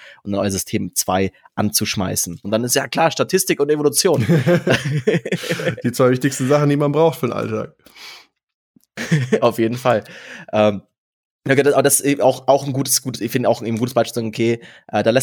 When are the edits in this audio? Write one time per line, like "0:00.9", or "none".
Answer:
0:02.4